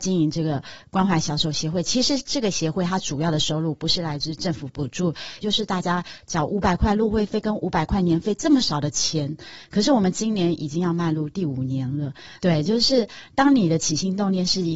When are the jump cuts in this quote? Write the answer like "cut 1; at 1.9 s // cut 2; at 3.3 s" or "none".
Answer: cut 1; at 2.2 s // cut 2; at 5.4 s // cut 3; at 12.4 s